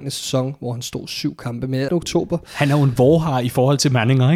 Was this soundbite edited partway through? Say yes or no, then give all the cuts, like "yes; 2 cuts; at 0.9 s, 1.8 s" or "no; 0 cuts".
yes; 1 cut; at 1.9 s